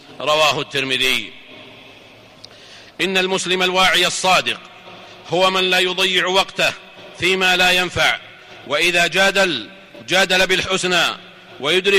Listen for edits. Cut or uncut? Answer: uncut